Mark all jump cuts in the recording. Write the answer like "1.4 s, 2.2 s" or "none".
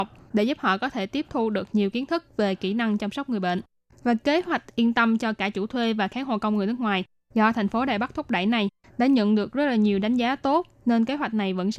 none